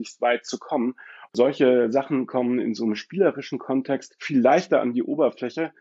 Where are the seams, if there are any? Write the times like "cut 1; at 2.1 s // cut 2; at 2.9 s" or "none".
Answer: cut 1; at 1.3 s